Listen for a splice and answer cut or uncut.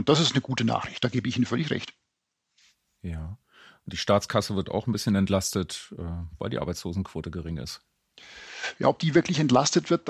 uncut